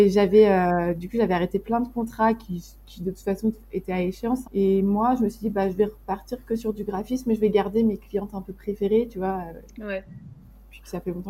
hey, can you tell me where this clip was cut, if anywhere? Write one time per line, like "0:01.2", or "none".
0:04.4